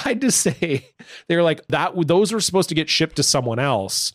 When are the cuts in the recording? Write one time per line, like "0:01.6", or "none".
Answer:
0:01.7